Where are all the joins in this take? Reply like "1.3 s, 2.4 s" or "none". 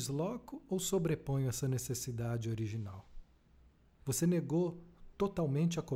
4.0 s

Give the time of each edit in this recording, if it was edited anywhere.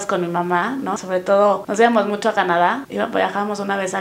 1.0 s

